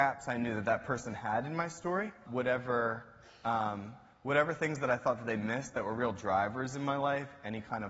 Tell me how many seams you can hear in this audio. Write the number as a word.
one